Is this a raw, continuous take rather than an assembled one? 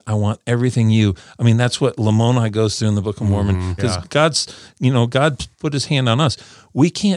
no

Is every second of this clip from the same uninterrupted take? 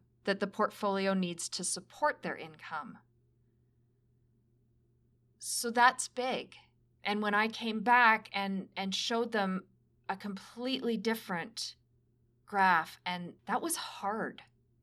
no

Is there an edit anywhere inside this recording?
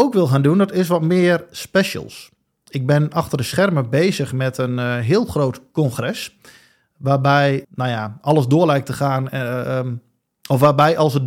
yes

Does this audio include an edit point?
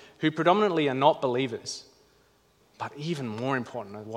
yes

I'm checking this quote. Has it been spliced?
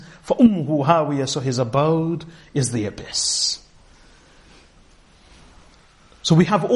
no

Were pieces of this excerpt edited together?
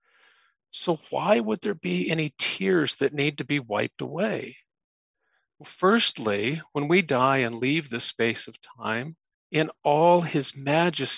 yes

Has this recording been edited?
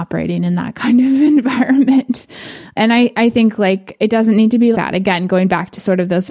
yes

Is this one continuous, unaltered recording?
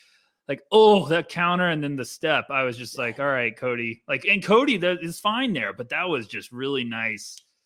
yes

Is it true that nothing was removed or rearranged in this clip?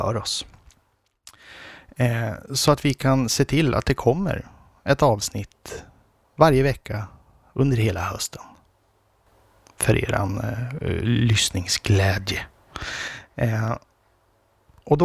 yes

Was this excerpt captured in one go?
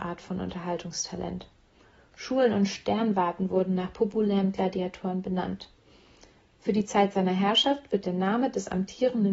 yes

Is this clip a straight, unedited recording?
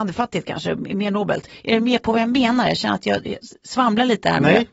yes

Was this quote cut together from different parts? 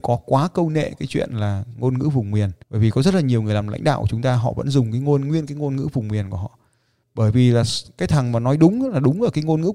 yes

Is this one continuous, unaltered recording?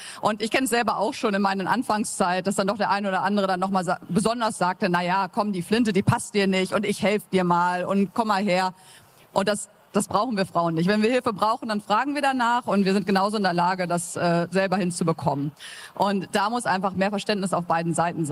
yes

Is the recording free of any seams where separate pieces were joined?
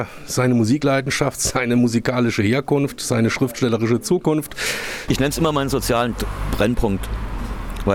no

